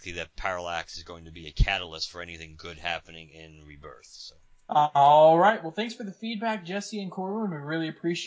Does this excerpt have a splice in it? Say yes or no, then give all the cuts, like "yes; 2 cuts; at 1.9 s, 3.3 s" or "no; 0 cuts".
no; 0 cuts